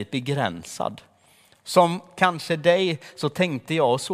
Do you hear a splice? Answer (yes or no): no